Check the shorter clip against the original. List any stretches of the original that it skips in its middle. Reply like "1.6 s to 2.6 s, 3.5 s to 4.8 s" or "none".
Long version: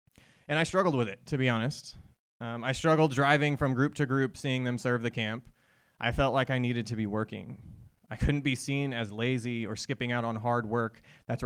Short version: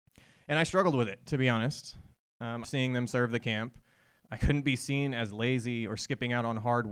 2.6 s to 4.3 s, 5.9 s to 8.0 s